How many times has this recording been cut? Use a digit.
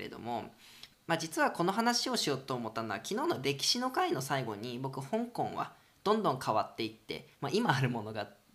1